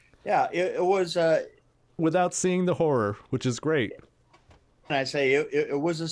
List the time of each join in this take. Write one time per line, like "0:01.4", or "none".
0:02.0
0:04.9